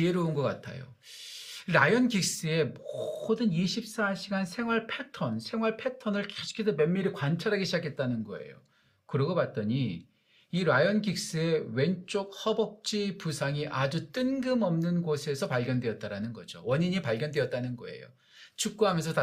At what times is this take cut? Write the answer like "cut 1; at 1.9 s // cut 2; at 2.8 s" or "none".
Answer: none